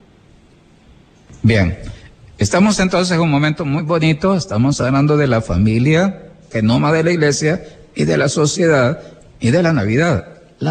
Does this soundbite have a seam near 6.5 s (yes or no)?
yes